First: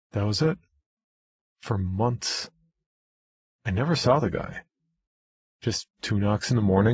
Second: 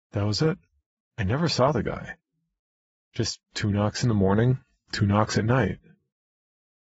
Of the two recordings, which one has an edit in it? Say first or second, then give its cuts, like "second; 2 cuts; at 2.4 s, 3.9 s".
second; 1 cut; at 1.0 s